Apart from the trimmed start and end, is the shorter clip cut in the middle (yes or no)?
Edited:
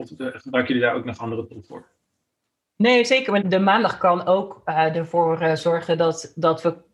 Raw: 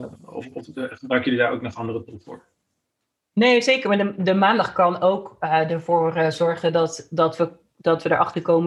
yes